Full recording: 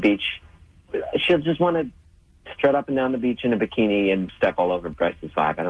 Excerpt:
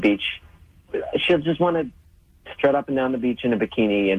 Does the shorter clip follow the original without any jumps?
yes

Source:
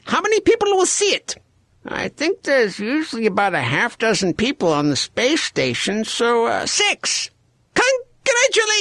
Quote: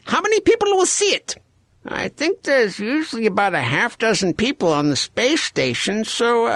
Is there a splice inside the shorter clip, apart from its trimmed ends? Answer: no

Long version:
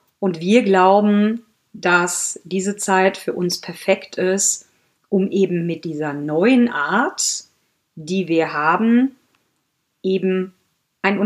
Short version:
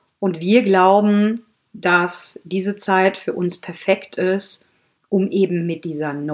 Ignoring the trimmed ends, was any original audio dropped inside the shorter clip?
no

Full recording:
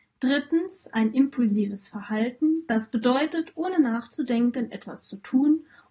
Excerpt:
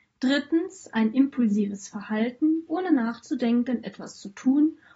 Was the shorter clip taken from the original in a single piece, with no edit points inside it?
no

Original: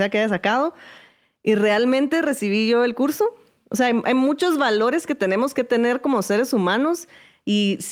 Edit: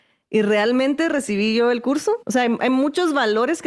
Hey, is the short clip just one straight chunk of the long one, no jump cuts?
no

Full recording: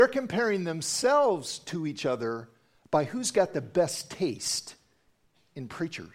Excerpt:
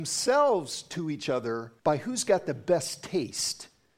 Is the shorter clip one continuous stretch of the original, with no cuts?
no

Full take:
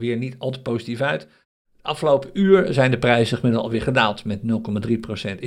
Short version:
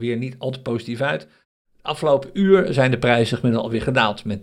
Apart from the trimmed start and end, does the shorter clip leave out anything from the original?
no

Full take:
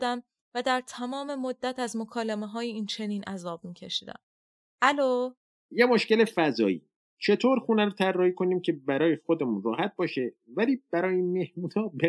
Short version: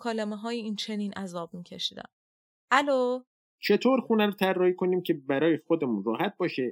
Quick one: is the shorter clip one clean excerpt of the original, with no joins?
no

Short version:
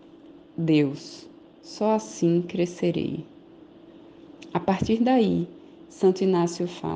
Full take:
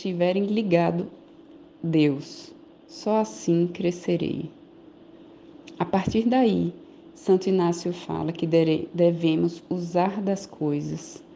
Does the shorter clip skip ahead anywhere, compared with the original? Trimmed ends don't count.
no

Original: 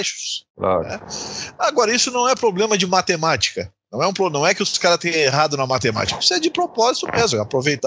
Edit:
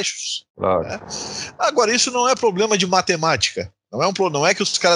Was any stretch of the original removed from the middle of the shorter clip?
no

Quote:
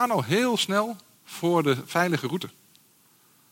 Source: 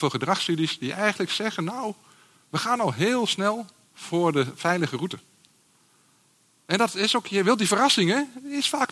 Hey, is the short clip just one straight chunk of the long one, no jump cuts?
yes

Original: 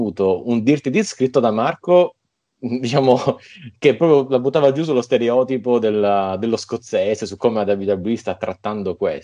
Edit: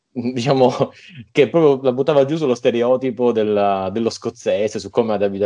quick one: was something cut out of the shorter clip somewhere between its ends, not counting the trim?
no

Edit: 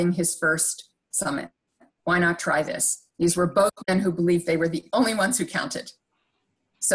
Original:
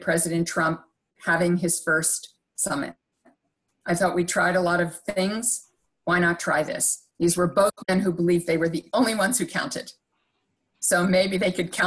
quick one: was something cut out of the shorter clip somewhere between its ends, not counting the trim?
yes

